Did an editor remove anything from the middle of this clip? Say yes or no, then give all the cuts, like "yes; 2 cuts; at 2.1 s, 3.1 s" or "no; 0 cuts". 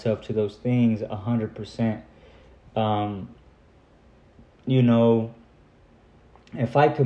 no; 0 cuts